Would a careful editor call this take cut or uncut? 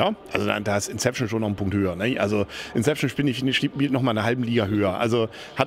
uncut